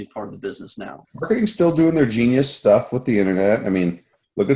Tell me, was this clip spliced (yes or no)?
yes